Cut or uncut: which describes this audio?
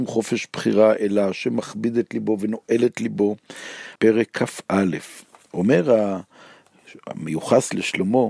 cut